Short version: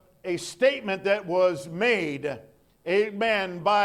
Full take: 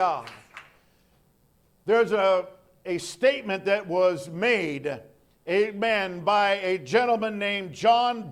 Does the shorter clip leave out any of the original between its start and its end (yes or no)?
no